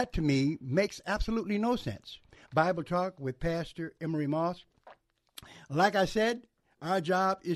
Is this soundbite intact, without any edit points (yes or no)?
no